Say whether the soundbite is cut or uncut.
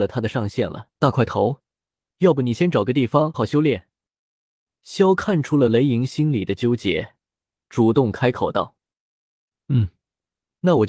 cut